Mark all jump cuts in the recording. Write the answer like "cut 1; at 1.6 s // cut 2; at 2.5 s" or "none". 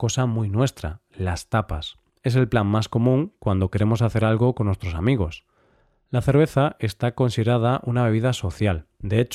cut 1; at 2.1 s